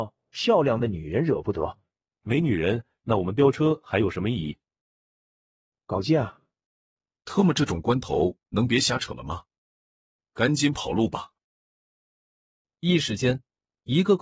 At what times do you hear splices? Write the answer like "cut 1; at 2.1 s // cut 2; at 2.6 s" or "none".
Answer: cut 1; at 2.1 s